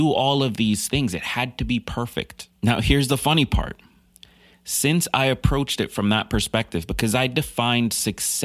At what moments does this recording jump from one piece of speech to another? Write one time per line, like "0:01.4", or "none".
0:02.6